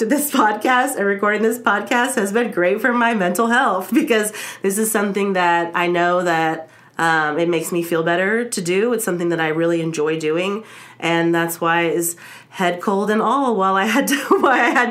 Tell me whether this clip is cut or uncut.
uncut